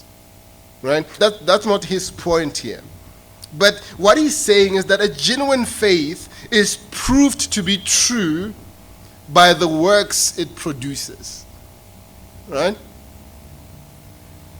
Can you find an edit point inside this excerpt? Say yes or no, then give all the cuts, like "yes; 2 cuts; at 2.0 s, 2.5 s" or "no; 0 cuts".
yes; 1 cut; at 1.2 s